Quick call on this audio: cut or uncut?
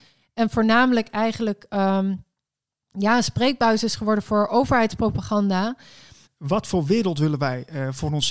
cut